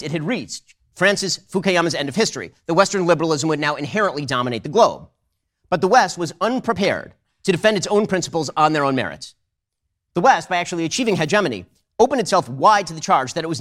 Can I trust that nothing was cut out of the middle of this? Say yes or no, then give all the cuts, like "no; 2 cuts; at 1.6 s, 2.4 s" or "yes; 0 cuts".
yes; 0 cuts